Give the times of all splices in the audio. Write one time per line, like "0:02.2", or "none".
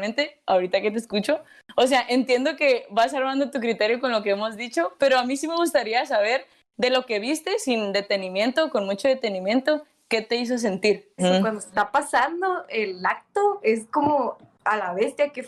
0:11.2